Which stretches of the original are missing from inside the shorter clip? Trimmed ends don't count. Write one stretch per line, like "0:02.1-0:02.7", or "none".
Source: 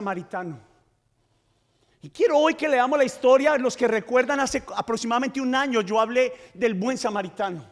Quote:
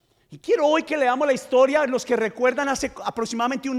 none